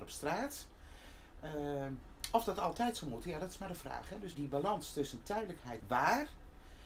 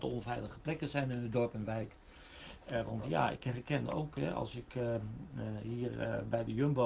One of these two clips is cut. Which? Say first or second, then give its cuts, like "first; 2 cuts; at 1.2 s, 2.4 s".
first; 2 cuts; at 4.3 s, 5.8 s